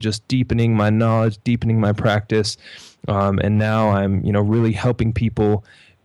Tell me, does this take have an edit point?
no; 0 cuts

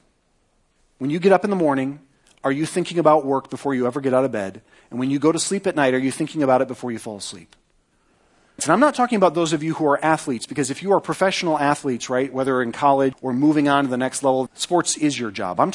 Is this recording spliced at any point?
yes; 3 cuts; at 8.6 s, 13.1 s, 14.5 s

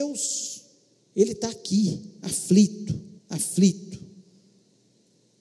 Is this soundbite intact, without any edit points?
no; 2 cuts; at 1.0 s, 3.2 s

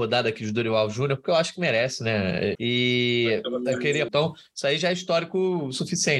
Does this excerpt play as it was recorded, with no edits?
no; 2 cuts; at 2.6 s, 4.1 s

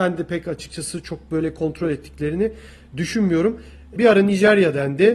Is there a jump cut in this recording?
yes; 1 cut; at 4.0 s

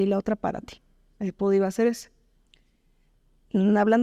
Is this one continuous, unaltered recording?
yes; 0 cuts

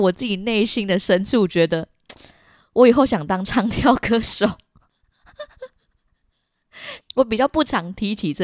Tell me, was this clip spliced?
no; 0 cuts

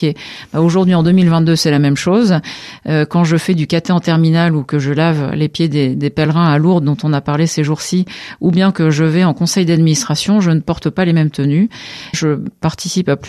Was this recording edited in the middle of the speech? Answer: yes; 1 cut; at 12.1 s

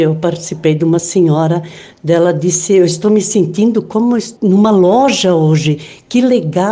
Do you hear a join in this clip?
no; 0 cuts

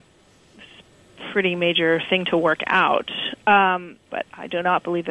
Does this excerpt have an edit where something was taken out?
yes; 1 cut; at 4.1 s

